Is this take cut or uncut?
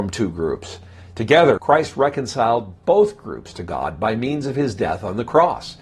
cut